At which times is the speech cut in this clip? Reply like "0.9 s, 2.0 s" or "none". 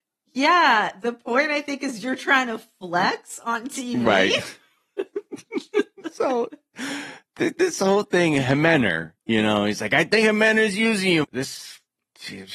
11.2 s